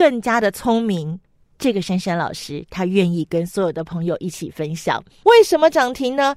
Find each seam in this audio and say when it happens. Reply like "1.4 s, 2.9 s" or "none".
1.5 s, 5.2 s